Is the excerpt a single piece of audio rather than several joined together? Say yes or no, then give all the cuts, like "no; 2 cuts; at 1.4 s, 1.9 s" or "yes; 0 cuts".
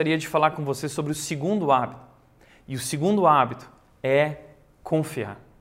yes; 0 cuts